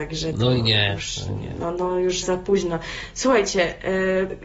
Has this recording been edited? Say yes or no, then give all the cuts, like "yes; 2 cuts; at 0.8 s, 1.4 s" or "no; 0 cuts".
yes; 1 cut; at 2.2 s